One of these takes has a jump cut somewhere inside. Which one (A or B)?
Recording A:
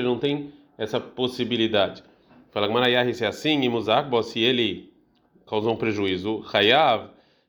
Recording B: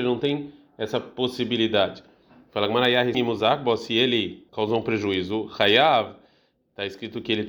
B